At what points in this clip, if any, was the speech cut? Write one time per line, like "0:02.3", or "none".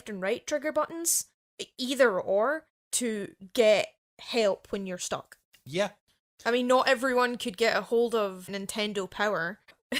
none